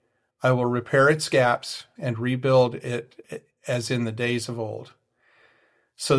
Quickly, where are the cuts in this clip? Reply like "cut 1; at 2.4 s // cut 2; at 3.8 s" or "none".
cut 1; at 2.0 s